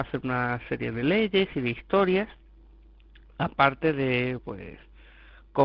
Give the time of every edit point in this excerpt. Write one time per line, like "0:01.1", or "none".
0:04.4